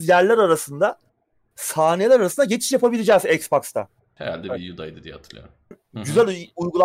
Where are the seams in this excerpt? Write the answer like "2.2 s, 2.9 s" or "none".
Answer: 4.2 s, 5.7 s